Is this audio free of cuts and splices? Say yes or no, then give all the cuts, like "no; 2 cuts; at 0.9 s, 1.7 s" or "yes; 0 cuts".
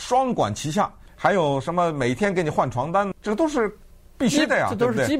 no; 2 cuts; at 1.1 s, 3.1 s